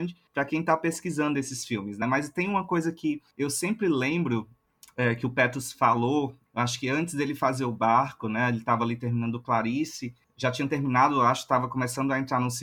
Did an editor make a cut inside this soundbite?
no; 0 cuts

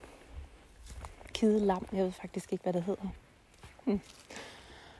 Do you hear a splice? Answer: no; 0 cuts

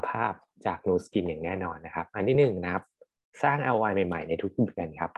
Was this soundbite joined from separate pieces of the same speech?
no; 0 cuts

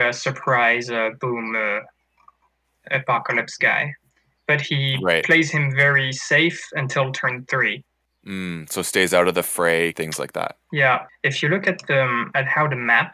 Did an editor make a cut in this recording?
yes; 2 cuts; at 9.9 s, 11.1 s

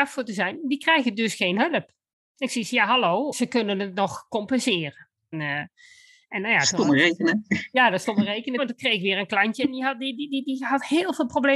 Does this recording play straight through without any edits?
no; 3 cuts; at 3.3 s, 5.3 s, 8.6 s

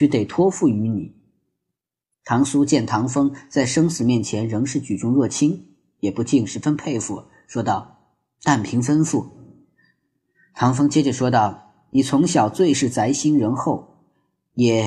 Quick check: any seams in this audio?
no; 0 cuts

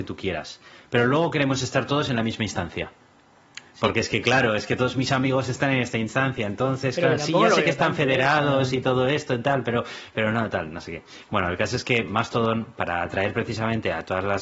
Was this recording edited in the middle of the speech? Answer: no; 0 cuts

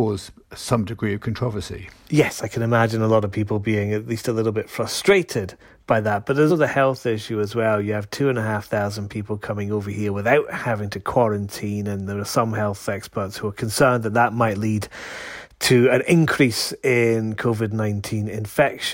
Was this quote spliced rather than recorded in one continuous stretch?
yes; 1 cut; at 6.5 s

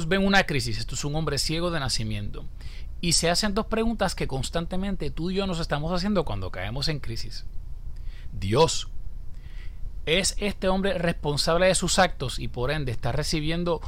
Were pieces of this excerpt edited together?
no; 0 cuts

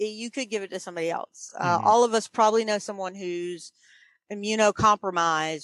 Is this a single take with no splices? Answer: yes; 0 cuts

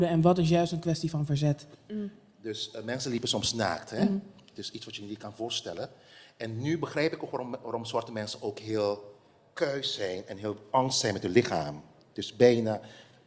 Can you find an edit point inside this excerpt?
no; 0 cuts

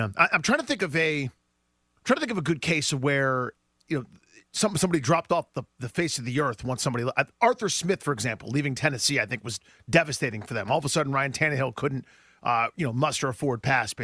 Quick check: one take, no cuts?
yes; 0 cuts

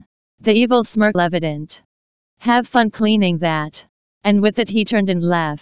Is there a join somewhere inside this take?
yes; 1 cut; at 1.1 s

